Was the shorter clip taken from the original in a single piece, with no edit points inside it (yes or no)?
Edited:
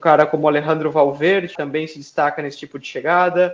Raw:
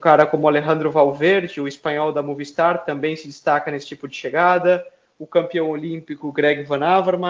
no